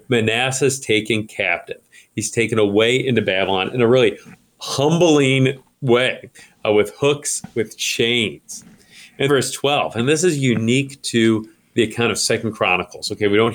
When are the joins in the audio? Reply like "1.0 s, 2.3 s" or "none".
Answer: 9.3 s